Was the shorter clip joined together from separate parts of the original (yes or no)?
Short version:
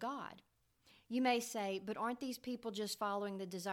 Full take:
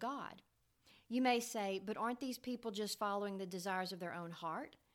no